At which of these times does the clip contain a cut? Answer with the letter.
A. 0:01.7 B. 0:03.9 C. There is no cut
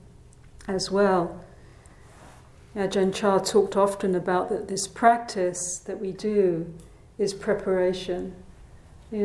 C